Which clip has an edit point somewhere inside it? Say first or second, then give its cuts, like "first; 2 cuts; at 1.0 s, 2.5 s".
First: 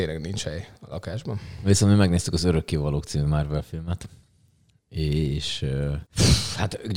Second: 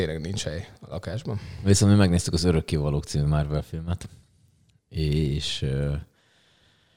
first; 1 cut; at 6.1 s